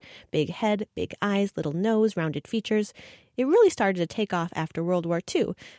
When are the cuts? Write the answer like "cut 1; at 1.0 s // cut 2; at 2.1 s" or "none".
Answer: none